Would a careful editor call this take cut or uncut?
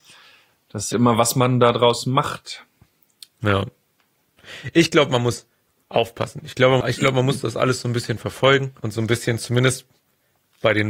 cut